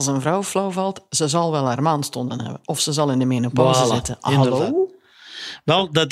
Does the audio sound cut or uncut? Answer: uncut